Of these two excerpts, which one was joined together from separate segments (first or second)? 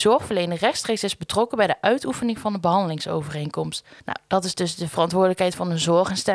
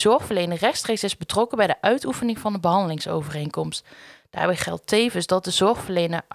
first